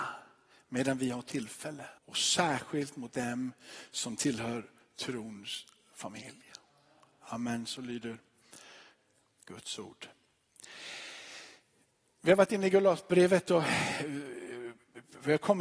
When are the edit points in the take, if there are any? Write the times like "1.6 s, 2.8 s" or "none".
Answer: 2.0 s